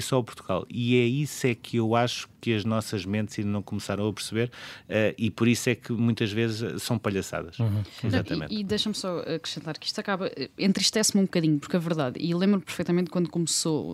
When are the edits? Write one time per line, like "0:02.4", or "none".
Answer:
none